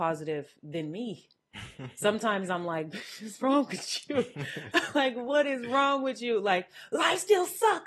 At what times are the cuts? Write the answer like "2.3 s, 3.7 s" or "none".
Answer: none